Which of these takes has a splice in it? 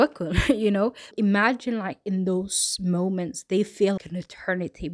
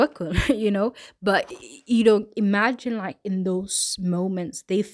first; 2 cuts; at 1.1 s, 4.0 s

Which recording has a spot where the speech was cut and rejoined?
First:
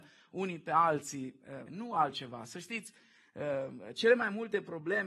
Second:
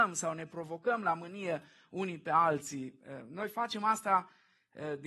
first; 1 cut; at 1.7 s

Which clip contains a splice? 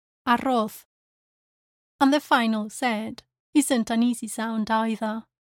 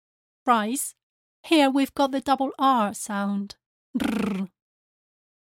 second; 1 cut; at 1.3 s

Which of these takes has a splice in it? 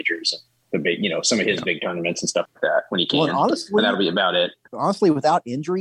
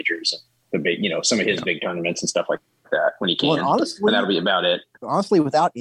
first; 1 cut; at 2.5 s

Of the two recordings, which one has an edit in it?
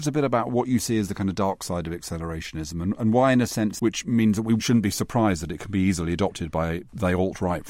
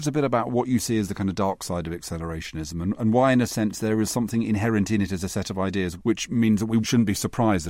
first; 1 cut; at 3.8 s

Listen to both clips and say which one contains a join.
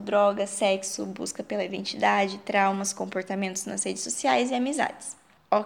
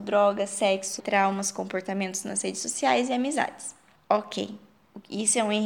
second; 1 cut; at 1.0 s

